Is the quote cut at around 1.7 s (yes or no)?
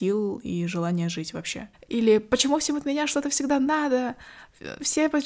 yes